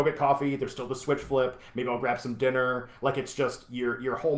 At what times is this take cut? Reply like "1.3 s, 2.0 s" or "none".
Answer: none